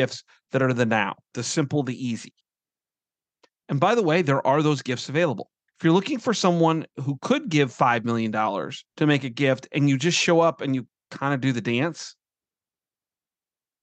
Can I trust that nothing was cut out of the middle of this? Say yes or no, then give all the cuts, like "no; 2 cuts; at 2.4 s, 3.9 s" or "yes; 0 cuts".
no; 3 cuts; at 1.3 s, 5.7 s, 8.9 s